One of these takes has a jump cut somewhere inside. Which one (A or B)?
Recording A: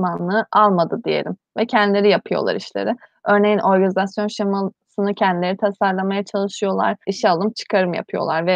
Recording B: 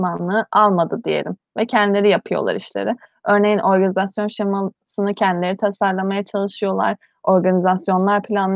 A